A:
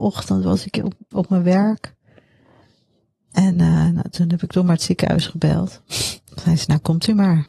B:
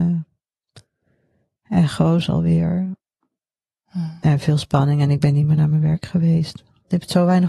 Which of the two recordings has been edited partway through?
A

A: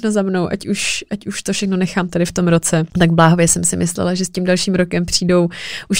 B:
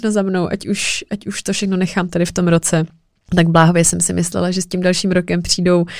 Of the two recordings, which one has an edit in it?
A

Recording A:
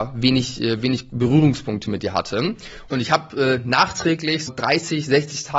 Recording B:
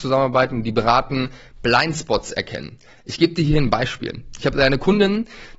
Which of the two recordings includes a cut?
A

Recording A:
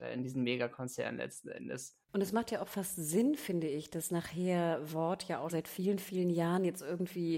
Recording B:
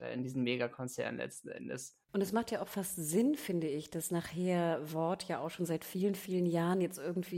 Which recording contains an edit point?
A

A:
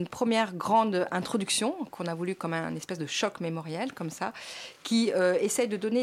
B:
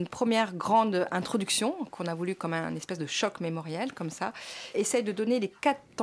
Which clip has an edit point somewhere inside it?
B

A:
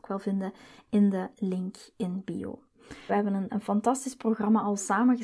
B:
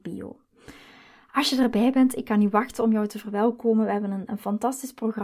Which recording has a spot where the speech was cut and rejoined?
A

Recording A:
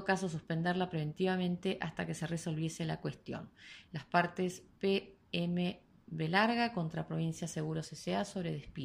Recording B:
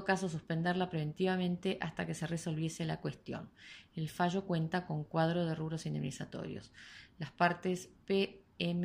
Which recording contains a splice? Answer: A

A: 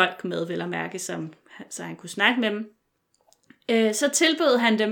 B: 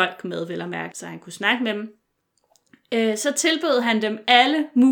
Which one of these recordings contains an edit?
B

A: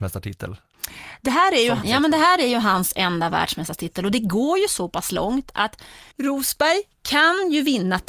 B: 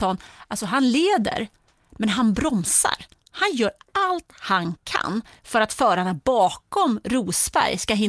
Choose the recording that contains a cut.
A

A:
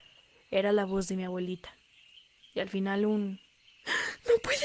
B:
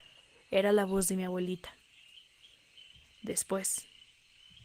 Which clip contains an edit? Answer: A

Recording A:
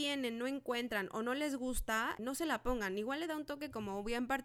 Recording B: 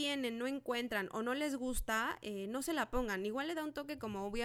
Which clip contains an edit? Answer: A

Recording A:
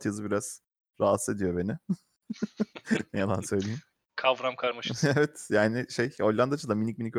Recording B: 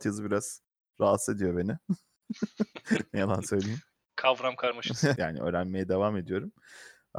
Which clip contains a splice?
B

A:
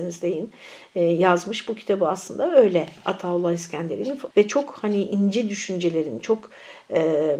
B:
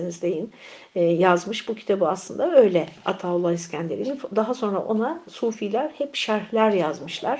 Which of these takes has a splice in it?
A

